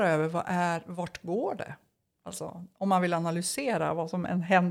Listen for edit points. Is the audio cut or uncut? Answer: uncut